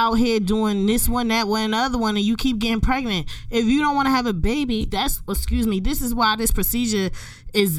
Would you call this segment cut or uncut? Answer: uncut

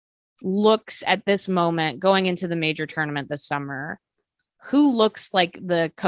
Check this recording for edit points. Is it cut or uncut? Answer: uncut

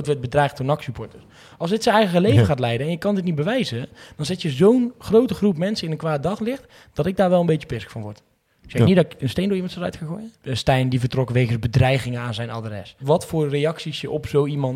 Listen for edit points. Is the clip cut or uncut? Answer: cut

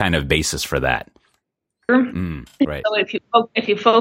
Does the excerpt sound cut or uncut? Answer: cut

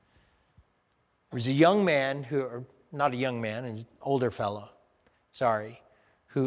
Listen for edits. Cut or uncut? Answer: uncut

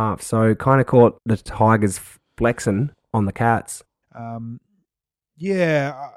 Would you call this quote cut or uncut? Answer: cut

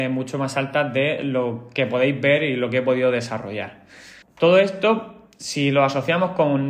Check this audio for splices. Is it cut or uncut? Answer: cut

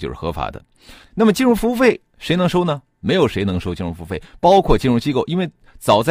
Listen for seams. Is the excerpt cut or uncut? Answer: cut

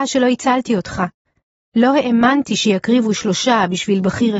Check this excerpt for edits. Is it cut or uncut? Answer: uncut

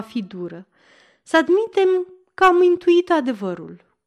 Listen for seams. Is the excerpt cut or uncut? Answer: uncut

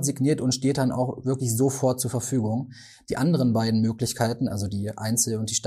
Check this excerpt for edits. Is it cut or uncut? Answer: uncut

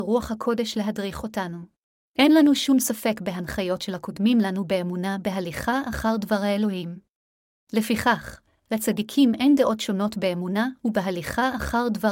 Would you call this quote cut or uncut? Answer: cut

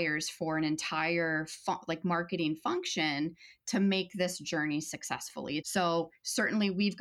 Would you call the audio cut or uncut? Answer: cut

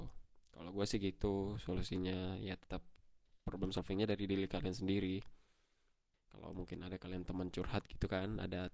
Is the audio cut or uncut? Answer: cut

